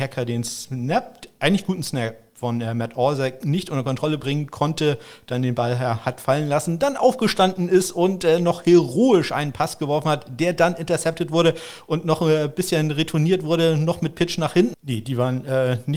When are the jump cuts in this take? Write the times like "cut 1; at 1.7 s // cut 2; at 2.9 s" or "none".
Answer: cut 1; at 14.7 s